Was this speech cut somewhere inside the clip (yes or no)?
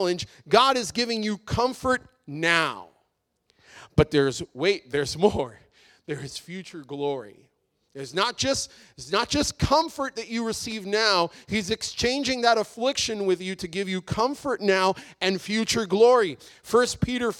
no